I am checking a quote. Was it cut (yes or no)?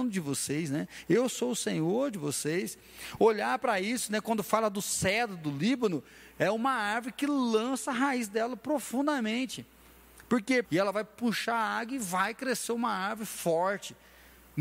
yes